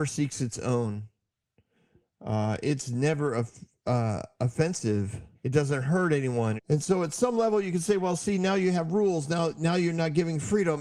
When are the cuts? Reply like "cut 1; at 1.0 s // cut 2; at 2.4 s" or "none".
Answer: cut 1; at 5.3 s // cut 2; at 6.6 s